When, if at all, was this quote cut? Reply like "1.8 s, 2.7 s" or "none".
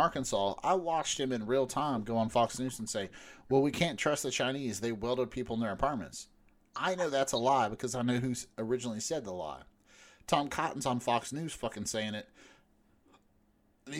none